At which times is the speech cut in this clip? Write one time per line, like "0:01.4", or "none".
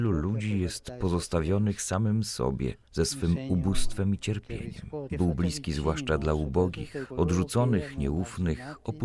0:02.8
0:05.1
0:07.1